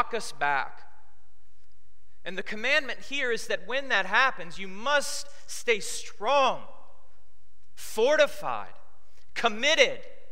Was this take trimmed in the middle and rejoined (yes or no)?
no